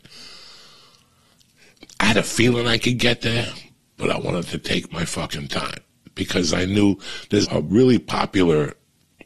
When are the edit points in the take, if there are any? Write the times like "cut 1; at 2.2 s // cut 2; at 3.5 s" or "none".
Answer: cut 1; at 7.5 s